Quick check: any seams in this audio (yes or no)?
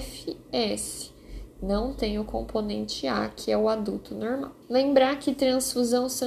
yes